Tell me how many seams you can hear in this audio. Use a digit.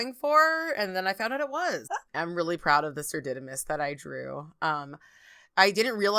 1